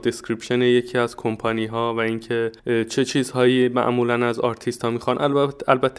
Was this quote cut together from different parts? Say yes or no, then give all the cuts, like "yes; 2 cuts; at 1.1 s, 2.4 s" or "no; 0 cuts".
yes; 1 cut; at 2.6 s